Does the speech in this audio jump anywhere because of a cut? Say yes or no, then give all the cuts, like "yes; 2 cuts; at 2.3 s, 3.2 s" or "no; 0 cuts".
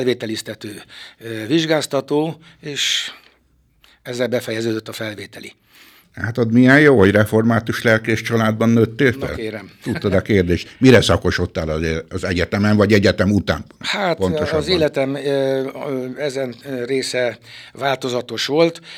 no; 0 cuts